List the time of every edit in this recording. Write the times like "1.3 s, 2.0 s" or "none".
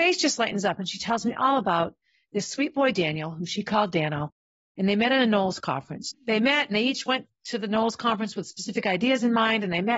6.1 s